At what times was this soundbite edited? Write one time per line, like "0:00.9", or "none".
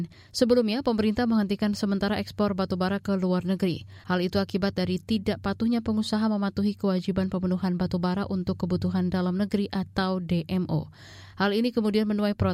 0:04.0